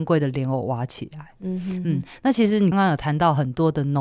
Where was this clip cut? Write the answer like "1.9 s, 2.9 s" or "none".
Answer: 2.7 s